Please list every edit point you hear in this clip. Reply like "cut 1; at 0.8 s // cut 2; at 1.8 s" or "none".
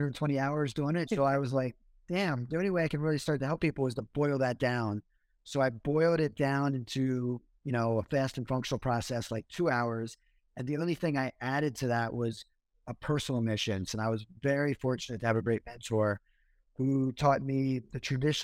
cut 1; at 1.0 s // cut 2; at 13.9 s